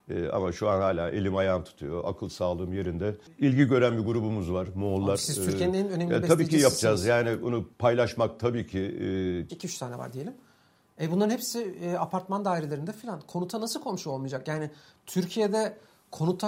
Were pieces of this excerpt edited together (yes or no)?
yes